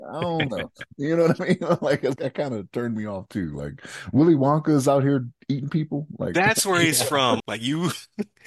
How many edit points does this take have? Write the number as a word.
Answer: two